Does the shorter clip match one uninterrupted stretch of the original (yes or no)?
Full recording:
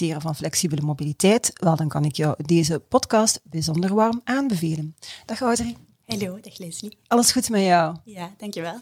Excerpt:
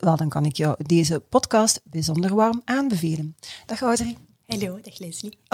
yes